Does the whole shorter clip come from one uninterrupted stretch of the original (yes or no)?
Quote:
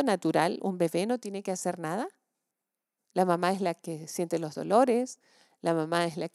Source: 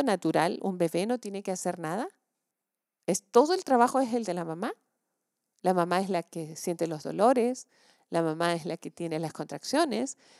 no